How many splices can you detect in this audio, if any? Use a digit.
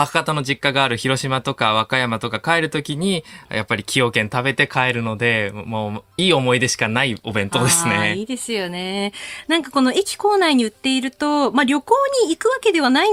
1